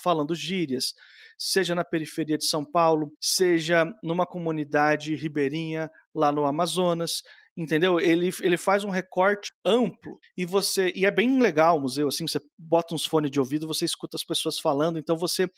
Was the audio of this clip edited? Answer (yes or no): yes